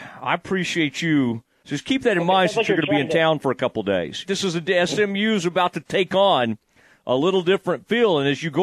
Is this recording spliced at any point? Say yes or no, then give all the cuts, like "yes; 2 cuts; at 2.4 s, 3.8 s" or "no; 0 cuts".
yes; 2 cuts; at 1.6 s, 4.2 s